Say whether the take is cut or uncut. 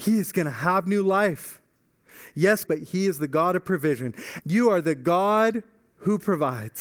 cut